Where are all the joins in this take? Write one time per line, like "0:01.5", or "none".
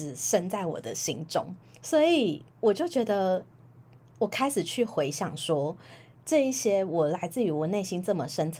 0:02.5
0:06.1